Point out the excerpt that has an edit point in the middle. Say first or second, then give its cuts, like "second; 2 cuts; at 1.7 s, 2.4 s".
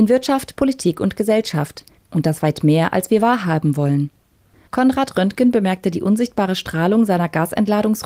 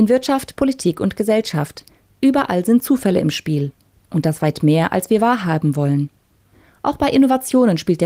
first; 2 cuts; at 2.0 s, 4.7 s